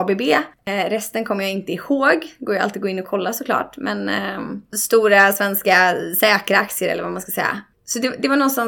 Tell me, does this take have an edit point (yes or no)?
no